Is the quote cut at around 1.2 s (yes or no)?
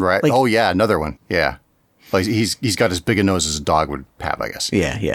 yes